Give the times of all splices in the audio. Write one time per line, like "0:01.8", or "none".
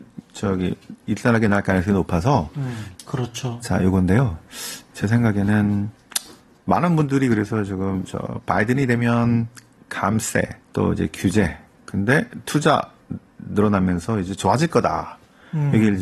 0:02.9
0:10.6